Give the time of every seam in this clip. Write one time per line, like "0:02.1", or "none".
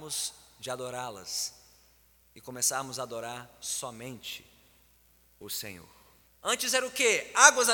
0:06.3